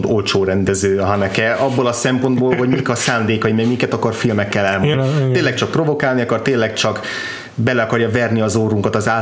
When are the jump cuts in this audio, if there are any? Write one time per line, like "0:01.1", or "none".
0:04.9